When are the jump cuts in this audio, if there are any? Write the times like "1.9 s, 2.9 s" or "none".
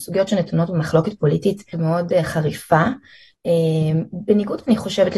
1.7 s